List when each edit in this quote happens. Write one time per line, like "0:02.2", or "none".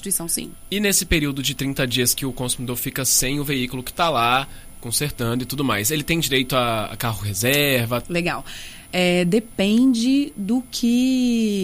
0:08.0